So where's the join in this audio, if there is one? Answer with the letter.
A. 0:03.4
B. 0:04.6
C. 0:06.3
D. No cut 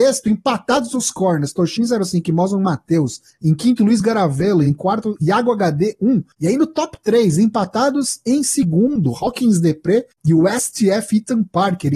D